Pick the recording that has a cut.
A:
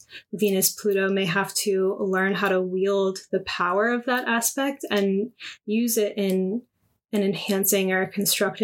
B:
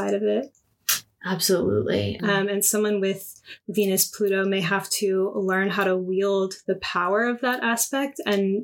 B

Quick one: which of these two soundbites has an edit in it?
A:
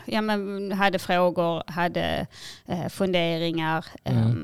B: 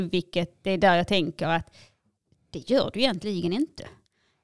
B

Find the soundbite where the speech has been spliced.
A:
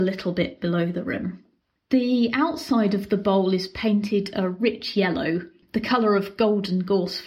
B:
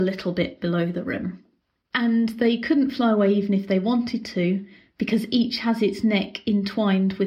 B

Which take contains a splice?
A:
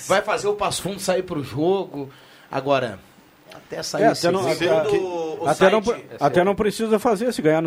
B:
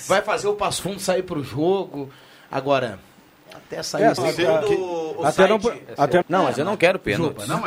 B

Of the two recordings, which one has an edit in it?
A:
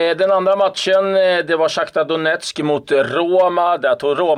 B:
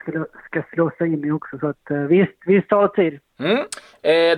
B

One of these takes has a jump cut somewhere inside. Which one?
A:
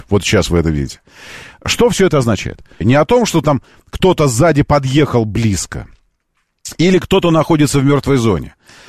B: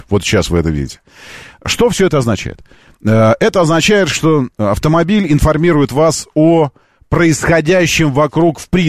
A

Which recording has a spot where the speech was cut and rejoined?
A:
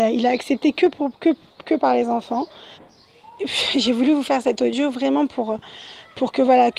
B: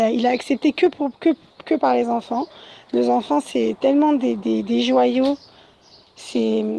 A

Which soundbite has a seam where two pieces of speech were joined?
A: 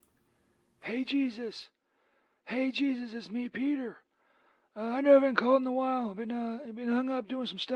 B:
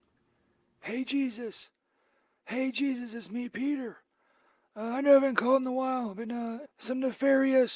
B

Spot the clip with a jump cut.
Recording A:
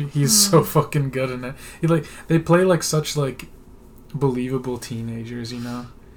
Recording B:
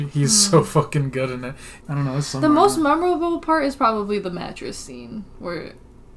B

